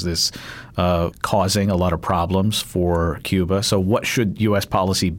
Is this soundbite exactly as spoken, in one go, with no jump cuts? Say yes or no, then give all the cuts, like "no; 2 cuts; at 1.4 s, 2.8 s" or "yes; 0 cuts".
no; 1 cut; at 1.1 s